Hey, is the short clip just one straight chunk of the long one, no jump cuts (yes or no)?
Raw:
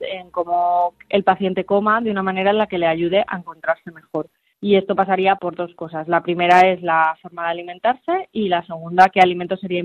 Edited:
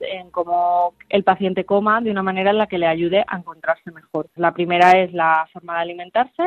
no